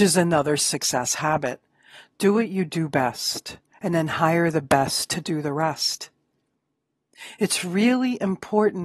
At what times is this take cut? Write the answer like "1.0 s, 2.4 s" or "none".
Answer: none